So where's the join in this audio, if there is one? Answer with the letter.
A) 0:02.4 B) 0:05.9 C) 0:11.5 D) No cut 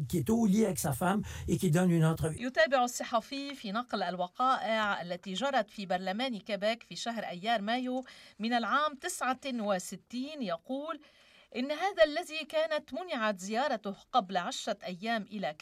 A